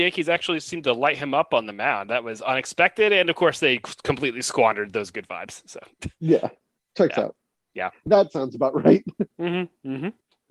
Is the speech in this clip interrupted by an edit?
no; 0 cuts

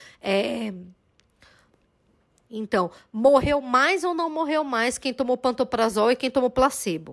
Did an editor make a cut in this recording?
yes; 1 cut; at 2.5 s

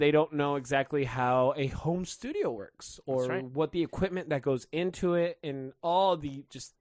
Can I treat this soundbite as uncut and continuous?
yes; 0 cuts

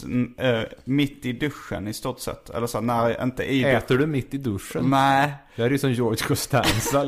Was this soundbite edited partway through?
no; 0 cuts

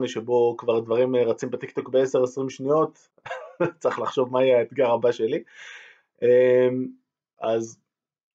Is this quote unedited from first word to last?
no; 1 cut; at 7.3 s

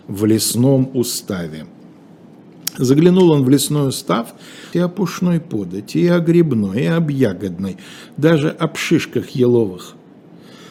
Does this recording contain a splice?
yes; 1 cut; at 4.7 s

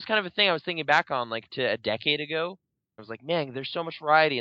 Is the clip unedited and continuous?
no; 1 cut; at 3.0 s

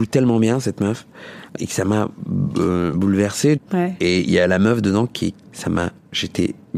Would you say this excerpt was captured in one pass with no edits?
no; 3 cuts; at 1.6 s, 3.6 s, 5.3 s

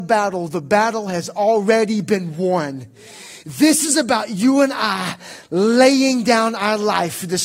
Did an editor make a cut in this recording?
no; 0 cuts

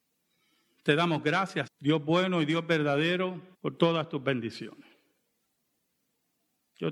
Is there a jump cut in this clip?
yes; 2 cuts; at 1.7 s, 3.5 s

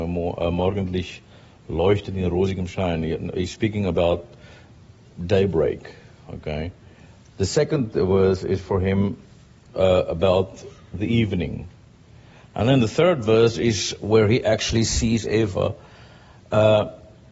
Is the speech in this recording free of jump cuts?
yes; 0 cuts

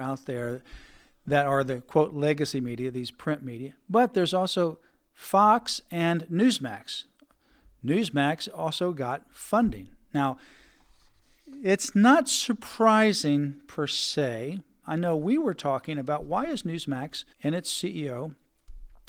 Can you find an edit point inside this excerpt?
yes; 2 cuts; at 14.8 s, 17.3 s

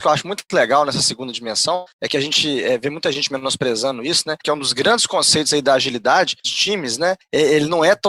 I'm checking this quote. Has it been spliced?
yes; 2 cuts; at 4.4 s, 6.4 s

